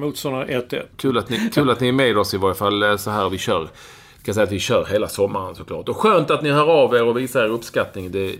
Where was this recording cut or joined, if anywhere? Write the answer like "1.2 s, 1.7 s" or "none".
0.9 s